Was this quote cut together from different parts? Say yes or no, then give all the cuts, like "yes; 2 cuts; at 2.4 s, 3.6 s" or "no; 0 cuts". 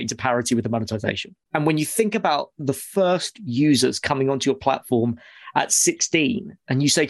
yes; 1 cut; at 1.4 s